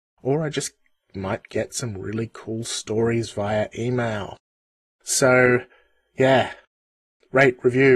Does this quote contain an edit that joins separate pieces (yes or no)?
no